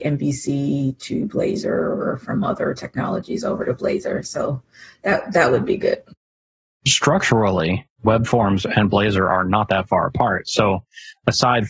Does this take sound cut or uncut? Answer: uncut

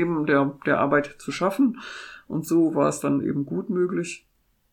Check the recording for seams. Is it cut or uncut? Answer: uncut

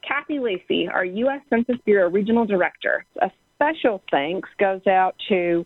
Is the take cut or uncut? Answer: cut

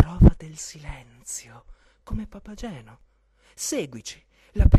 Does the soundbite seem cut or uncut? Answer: uncut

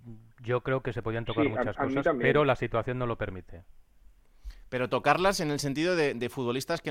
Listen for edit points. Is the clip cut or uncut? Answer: uncut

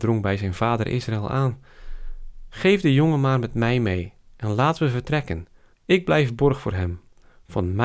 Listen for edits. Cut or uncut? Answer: cut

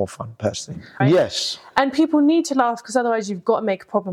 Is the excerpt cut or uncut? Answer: cut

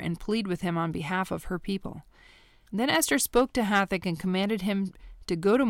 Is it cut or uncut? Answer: cut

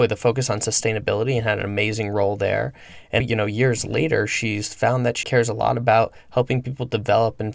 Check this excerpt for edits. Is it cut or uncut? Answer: cut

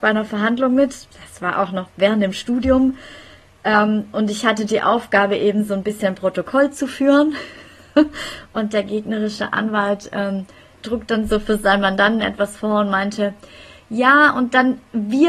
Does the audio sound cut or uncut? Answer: uncut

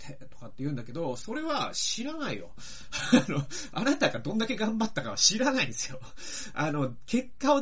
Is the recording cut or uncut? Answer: uncut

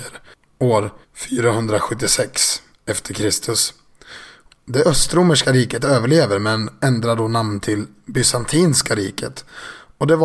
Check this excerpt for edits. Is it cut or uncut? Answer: cut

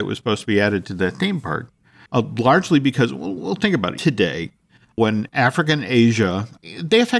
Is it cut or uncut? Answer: cut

